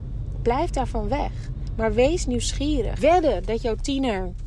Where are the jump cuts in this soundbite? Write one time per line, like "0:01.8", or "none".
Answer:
0:03.0